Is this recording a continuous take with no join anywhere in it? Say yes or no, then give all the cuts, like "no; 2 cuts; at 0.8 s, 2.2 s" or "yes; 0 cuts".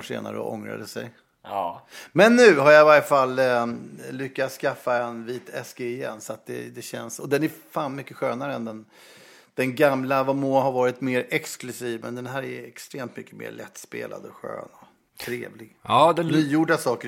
yes; 0 cuts